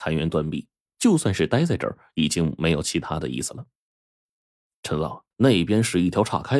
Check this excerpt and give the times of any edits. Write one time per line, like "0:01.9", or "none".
0:05.3